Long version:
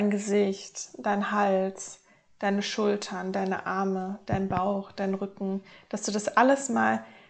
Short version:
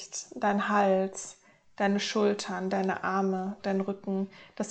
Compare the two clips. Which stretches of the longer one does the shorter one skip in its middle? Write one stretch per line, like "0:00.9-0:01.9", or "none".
0:04.2-0:04.9